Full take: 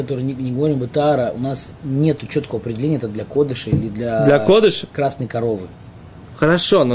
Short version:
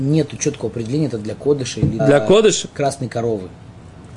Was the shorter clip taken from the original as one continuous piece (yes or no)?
no